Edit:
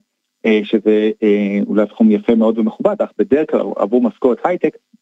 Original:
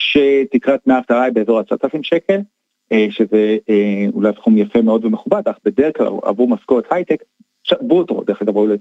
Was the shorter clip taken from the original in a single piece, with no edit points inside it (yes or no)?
yes